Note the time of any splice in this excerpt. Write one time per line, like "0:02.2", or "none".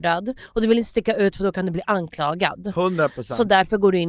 none